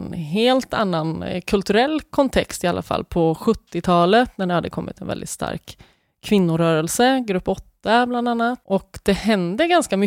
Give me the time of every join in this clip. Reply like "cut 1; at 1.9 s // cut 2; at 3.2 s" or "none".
cut 1; at 8.6 s